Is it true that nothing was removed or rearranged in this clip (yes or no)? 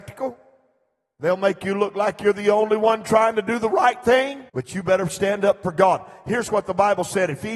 no